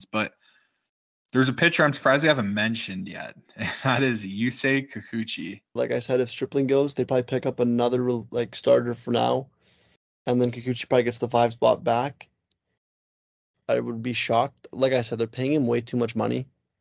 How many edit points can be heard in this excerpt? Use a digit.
2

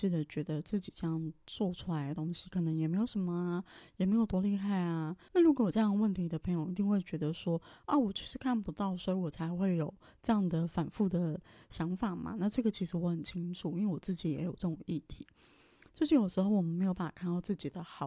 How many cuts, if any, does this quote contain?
1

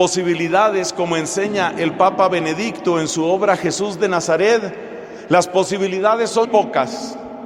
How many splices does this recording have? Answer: 1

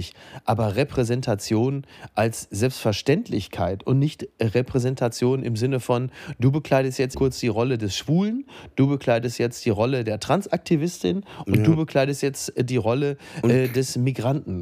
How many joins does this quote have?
1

